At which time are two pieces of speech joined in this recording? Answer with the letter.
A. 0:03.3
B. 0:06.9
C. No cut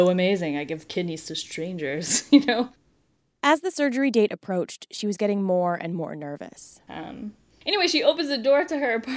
B